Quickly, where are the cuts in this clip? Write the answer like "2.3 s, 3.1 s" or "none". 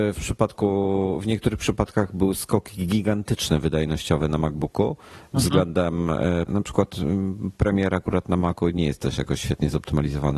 6.5 s